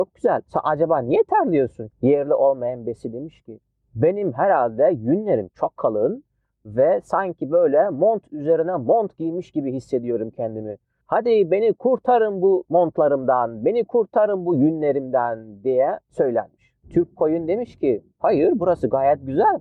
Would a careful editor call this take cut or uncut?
cut